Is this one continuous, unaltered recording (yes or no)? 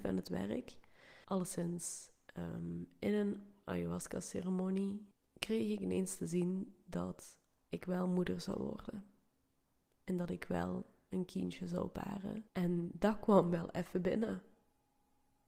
no